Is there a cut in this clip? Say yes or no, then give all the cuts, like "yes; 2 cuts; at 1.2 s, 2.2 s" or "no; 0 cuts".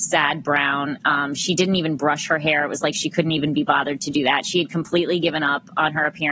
no; 0 cuts